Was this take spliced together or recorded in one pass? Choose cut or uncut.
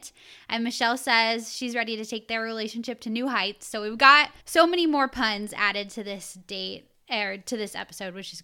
cut